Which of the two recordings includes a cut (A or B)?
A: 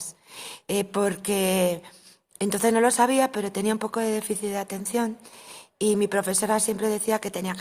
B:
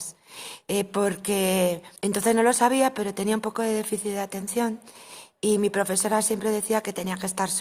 B